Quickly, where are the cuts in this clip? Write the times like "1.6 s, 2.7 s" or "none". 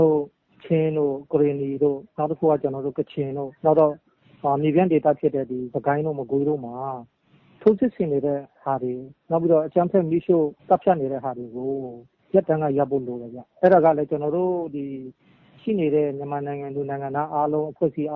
3.6 s, 10.6 s, 13.5 s